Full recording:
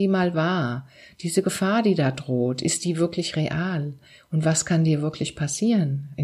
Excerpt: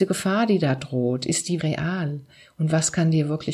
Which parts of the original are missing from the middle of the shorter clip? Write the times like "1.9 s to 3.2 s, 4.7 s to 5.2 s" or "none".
3.0 s to 3.3 s